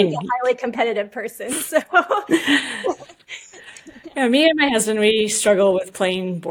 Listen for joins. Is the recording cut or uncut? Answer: uncut